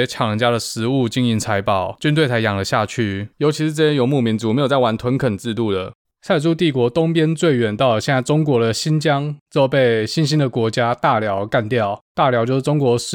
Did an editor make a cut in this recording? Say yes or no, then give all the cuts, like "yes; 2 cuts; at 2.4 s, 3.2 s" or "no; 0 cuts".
yes; 1 cut; at 6.0 s